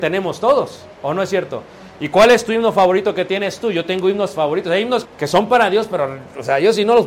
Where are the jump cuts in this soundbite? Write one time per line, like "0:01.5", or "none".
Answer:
0:05.1